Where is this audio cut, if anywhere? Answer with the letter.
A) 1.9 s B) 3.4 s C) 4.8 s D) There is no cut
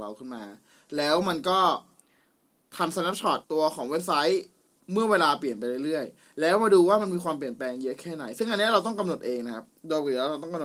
B